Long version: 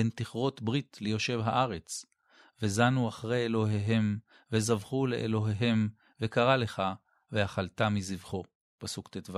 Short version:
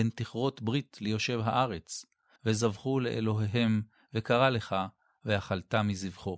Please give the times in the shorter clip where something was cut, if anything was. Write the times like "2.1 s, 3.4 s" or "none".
2.4 s